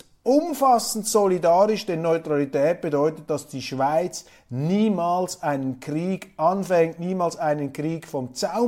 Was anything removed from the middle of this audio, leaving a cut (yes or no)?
no